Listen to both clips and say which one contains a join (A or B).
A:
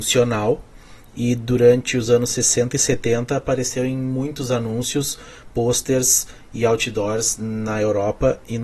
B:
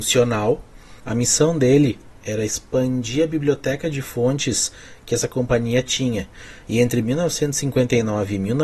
B